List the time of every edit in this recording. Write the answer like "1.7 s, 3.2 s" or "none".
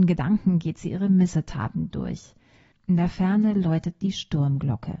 2.7 s